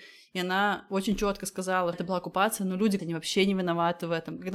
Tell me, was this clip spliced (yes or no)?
yes